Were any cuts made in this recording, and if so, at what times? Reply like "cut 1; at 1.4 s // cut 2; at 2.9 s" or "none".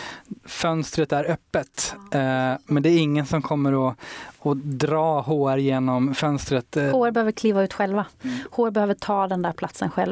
none